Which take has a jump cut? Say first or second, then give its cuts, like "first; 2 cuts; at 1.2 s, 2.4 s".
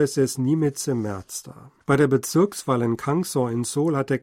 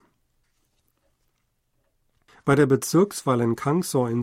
first; 1 cut; at 1.8 s